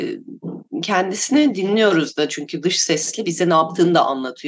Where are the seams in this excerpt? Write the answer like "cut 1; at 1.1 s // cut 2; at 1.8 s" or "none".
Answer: none